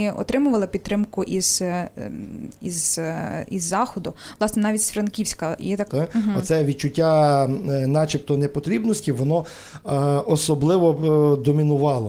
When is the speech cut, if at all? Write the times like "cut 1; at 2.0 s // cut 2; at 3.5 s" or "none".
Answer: cut 1; at 5.9 s